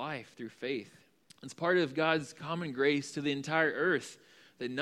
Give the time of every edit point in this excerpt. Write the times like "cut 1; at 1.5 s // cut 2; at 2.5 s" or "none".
cut 1; at 1.2 s